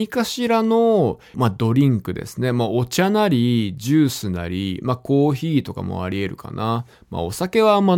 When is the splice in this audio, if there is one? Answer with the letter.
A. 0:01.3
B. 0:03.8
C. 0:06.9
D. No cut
A